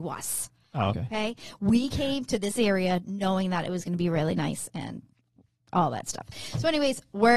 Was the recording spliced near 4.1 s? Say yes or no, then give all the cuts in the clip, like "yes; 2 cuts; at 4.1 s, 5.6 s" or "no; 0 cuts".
no; 1 cut; at 0.9 s